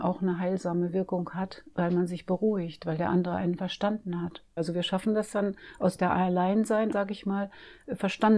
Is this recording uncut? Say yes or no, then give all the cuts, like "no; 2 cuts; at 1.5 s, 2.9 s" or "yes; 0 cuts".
no; 2 cuts; at 4.6 s, 6.9 s